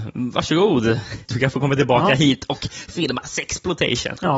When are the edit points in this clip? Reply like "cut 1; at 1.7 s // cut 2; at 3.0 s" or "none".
cut 1; at 1.2 s